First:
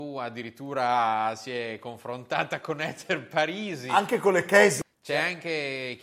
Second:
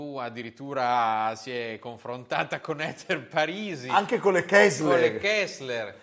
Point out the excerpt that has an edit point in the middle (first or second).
first